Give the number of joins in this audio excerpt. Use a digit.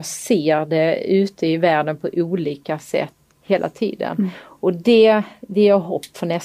1